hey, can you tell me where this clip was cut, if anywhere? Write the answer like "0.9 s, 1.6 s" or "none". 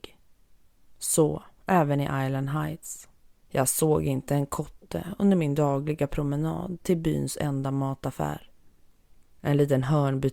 3.4 s